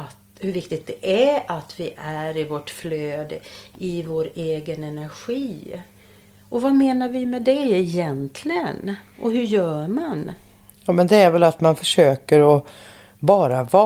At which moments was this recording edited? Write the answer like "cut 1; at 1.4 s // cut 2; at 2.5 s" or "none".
none